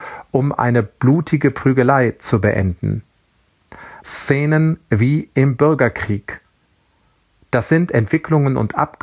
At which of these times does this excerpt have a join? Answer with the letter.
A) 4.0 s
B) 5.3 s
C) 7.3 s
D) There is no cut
A